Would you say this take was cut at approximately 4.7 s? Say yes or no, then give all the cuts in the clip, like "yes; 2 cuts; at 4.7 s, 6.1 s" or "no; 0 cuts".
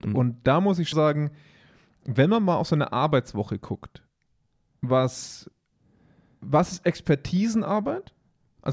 no; 1 cut; at 0.9 s